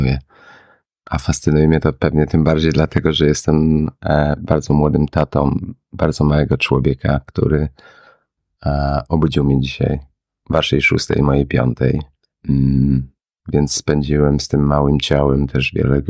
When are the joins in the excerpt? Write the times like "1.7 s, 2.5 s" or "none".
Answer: none